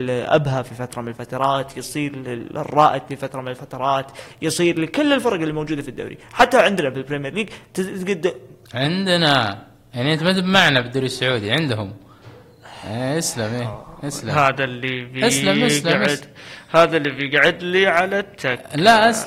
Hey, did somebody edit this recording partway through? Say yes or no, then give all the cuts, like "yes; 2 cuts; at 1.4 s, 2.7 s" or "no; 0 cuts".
no; 0 cuts